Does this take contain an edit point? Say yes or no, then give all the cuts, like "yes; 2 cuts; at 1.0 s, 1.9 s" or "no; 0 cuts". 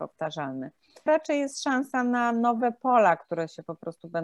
yes; 1 cut; at 1.1 s